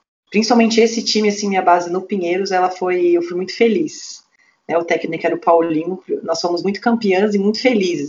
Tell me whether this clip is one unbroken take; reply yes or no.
yes